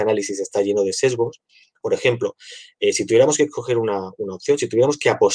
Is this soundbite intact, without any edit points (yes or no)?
no